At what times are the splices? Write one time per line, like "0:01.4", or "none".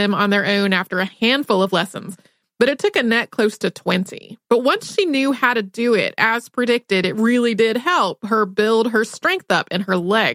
none

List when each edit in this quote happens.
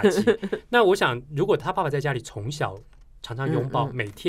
none

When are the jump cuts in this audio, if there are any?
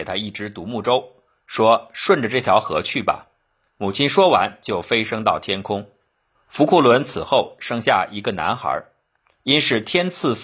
0:06.3

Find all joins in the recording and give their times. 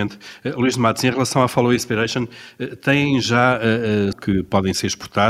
0:04.1

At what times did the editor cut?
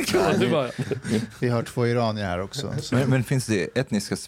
0:03.2

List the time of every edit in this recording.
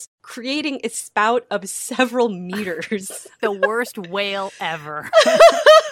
0:03.4

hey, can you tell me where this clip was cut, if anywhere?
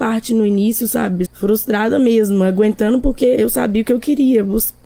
0:01.3

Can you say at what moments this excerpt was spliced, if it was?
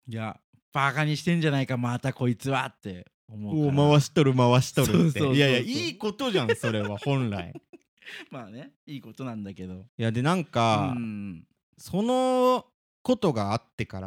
0:09.9

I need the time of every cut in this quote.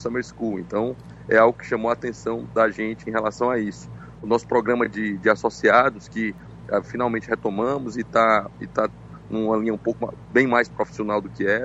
none

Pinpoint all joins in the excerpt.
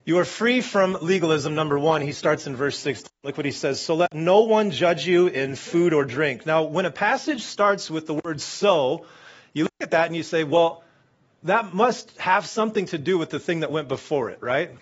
none

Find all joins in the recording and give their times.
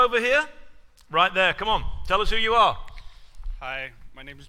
none

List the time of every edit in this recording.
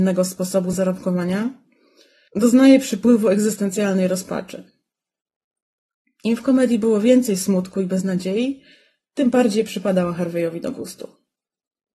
none

